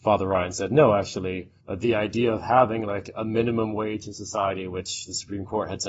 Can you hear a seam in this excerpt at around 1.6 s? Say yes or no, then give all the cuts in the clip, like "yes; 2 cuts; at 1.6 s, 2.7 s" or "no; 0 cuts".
yes; 1 cut; at 1.6 s